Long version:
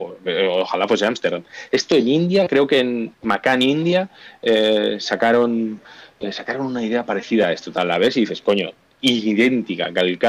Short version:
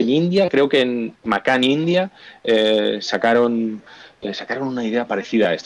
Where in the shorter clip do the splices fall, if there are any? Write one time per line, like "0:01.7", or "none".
none